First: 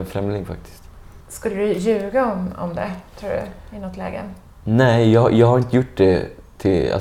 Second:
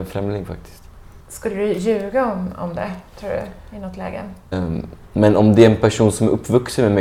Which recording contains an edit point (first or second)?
second